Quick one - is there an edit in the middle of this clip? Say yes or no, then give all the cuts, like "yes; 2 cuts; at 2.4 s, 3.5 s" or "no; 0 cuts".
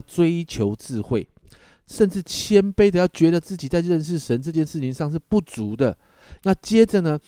yes; 1 cut; at 6.4 s